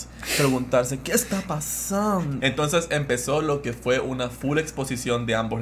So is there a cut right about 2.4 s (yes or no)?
yes